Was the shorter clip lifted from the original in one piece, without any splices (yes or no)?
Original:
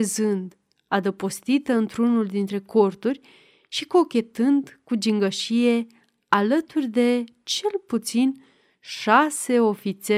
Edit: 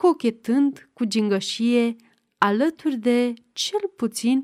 yes